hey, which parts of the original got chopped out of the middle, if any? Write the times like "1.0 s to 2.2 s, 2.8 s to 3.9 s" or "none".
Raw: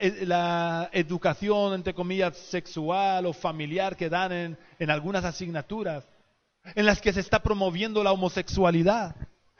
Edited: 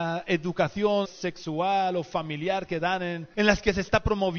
1.7 s to 2.3 s, 4.6 s to 6.7 s